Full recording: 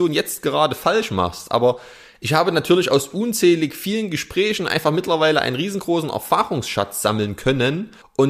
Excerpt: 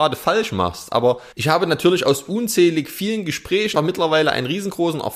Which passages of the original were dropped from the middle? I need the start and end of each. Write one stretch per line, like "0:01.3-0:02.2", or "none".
0:01.9-0:02.2
0:04.6-0:04.8

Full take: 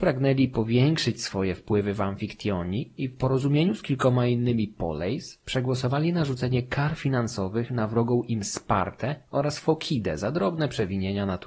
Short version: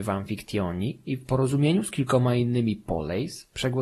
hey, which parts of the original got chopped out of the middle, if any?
none

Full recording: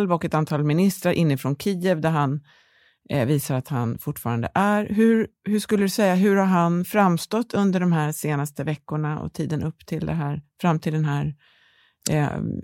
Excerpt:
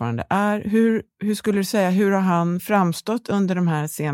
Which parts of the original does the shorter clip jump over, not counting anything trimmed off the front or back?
none

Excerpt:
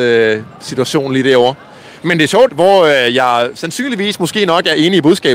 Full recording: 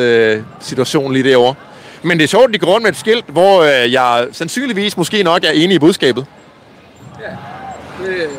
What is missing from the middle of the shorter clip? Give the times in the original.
0:02.5-0:03.3

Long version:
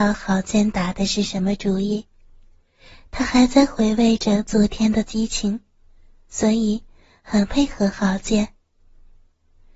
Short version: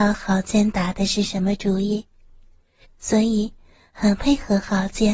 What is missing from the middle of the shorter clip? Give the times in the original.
0:02.8-0:06.1

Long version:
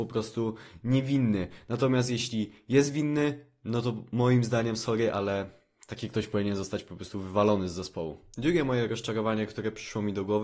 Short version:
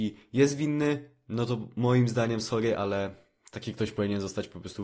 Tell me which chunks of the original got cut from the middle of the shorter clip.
none

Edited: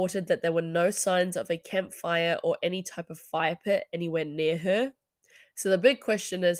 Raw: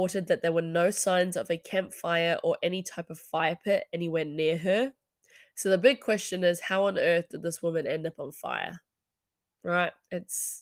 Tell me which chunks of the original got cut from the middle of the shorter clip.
none

